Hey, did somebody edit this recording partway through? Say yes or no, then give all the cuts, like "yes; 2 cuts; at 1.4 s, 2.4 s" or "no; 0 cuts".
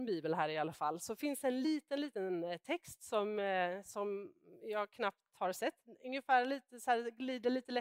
no; 0 cuts